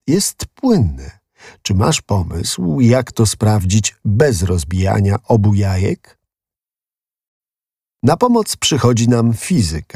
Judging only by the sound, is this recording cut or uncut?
uncut